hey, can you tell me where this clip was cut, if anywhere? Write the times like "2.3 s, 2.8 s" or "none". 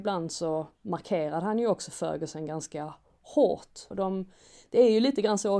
3.9 s